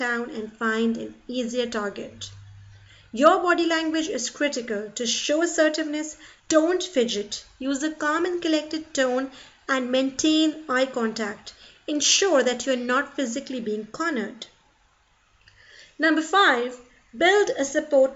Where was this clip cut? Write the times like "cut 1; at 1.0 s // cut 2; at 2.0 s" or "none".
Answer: cut 1; at 6.4 s